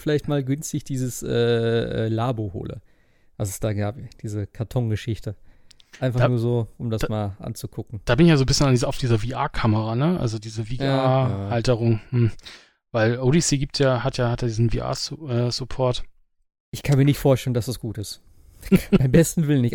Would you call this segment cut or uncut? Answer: uncut